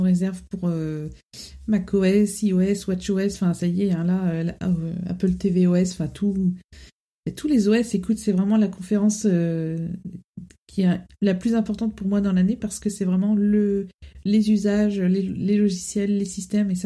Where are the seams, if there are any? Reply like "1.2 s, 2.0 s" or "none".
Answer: none